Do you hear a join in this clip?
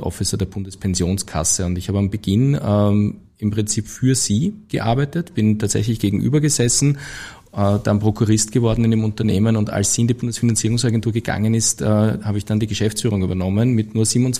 no; 0 cuts

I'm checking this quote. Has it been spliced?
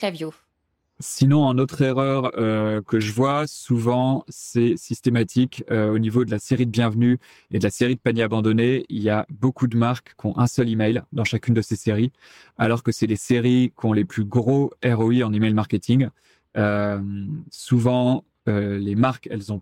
no; 0 cuts

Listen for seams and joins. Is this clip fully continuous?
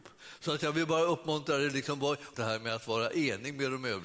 no; 1 cut; at 2.3 s

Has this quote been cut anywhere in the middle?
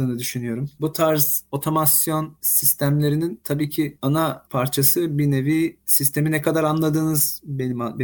no; 0 cuts

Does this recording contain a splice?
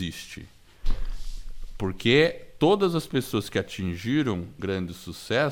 yes; 1 cut; at 4.6 s

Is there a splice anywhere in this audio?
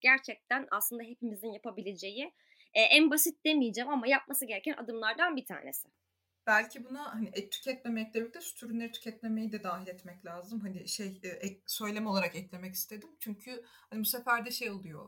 no; 0 cuts

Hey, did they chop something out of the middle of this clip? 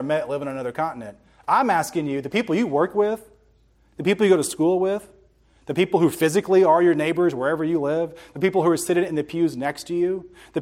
no; 0 cuts

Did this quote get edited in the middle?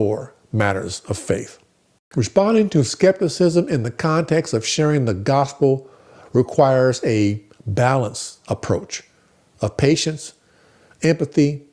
no; 0 cuts

